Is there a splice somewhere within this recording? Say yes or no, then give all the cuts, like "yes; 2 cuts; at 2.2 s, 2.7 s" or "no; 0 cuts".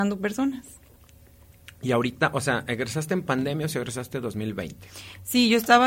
no; 0 cuts